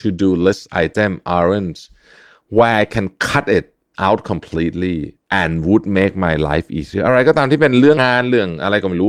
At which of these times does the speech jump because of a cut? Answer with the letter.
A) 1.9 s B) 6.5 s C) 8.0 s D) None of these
C